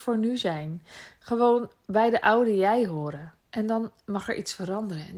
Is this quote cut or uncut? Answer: cut